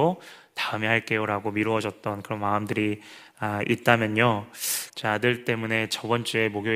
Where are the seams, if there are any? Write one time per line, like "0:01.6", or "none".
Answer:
0:04.9